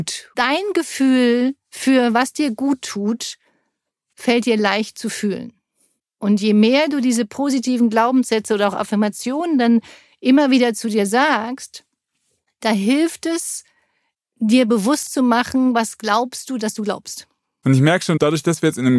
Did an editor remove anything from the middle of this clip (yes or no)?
no